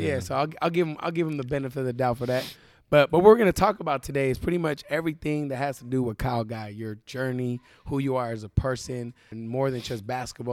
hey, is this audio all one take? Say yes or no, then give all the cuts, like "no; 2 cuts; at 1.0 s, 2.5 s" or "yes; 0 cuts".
no; 1 cut; at 9.3 s